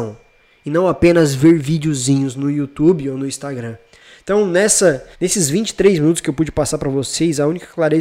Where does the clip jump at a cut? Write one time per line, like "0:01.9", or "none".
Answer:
0:05.1